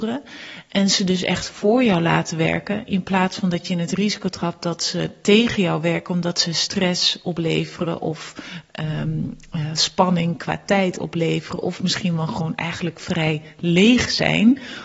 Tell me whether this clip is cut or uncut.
uncut